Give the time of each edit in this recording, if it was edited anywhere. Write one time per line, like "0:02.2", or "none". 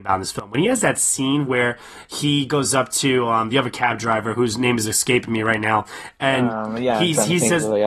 none

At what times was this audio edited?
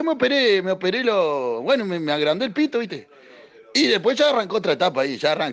none

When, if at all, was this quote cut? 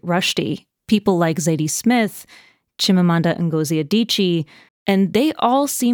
0:04.7

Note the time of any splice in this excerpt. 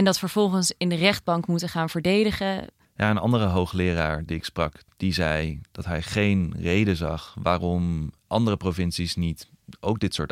0:02.8
0:04.9
0:08.2

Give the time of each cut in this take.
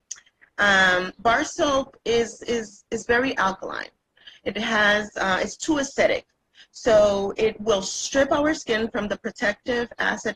none

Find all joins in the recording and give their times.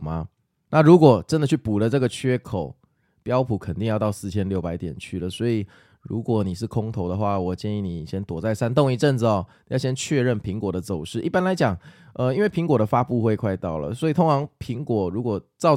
none

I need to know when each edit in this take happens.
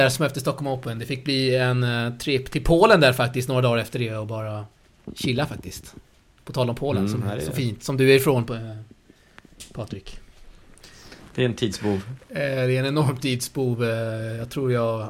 0:11.3

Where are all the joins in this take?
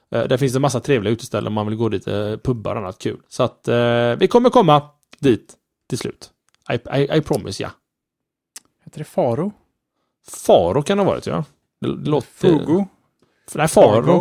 none

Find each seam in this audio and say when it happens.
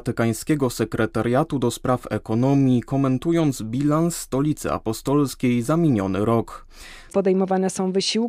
0:07.1

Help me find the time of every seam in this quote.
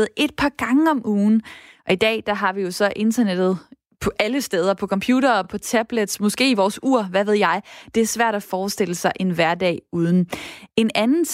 none

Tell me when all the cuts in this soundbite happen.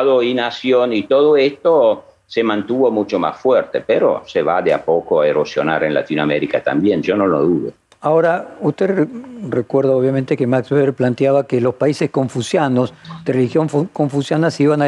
none

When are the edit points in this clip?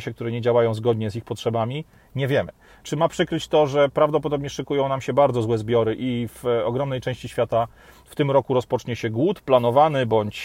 0:02.8

